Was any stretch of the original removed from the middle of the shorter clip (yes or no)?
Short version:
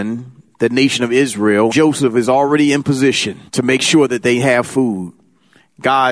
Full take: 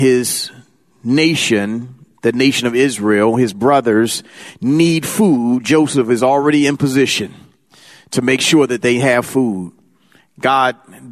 yes